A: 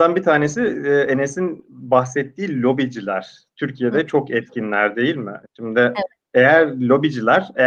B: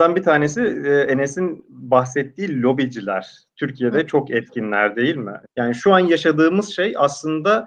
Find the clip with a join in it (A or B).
B